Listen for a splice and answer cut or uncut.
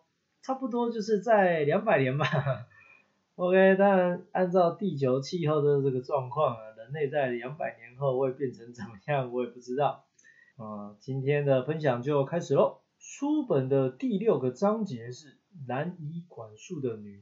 cut